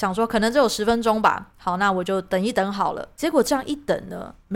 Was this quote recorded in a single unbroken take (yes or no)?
yes